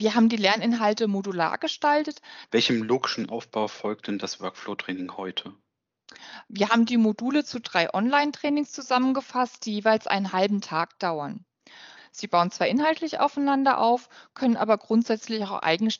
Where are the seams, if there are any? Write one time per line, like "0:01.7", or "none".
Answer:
0:02.5
0:12.0